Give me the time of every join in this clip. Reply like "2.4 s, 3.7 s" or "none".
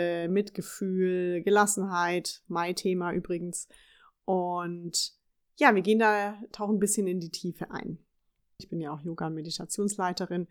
8.6 s